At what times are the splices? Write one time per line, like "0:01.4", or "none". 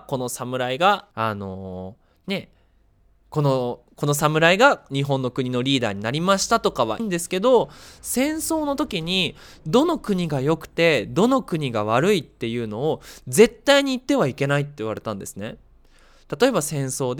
0:01.1
0:07.0